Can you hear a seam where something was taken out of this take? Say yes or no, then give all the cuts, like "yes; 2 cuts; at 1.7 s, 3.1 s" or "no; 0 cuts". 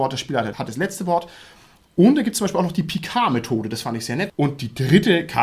yes; 1 cut; at 4.3 s